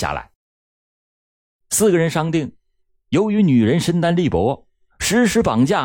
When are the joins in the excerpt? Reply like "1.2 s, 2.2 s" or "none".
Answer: none